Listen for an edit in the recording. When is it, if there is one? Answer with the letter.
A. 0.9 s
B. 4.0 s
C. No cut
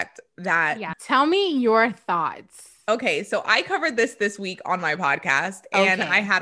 A